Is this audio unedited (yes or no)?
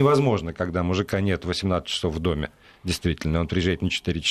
yes